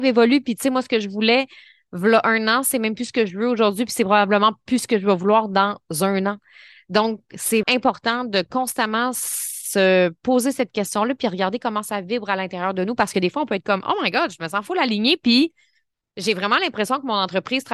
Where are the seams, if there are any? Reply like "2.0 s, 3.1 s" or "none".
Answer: 7.6 s

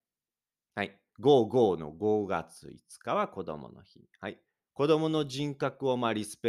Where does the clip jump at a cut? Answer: 1.1 s

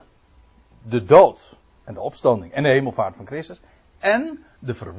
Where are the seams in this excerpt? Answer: none

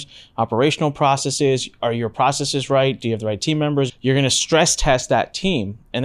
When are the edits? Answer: 3.9 s

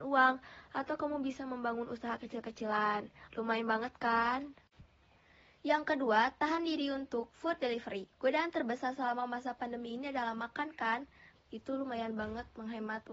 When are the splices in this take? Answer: 8.1 s, 11.4 s

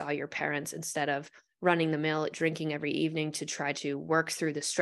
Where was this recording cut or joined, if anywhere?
2.3 s

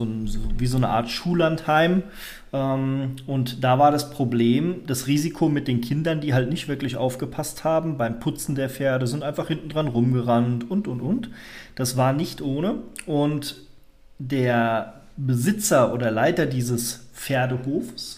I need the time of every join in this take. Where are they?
none

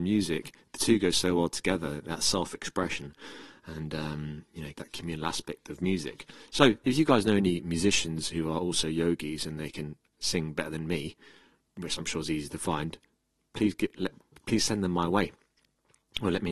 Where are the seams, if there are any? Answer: 4.7 s

